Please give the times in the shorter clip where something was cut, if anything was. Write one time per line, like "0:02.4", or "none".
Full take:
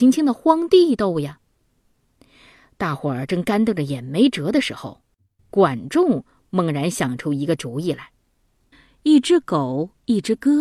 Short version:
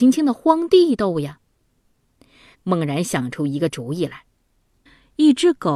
0:02.5